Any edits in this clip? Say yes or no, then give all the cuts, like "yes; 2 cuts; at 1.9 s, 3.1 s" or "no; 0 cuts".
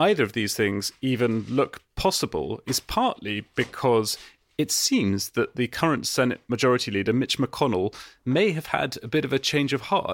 no; 0 cuts